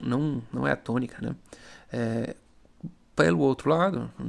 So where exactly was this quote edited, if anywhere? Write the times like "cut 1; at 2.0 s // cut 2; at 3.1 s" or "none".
none